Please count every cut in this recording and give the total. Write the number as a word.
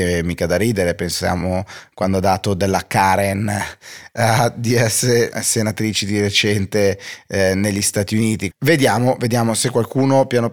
one